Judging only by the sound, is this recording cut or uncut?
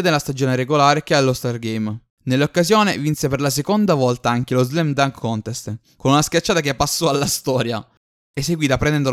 cut